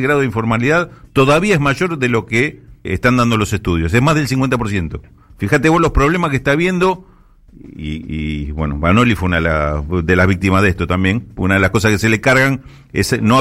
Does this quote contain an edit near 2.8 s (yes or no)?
yes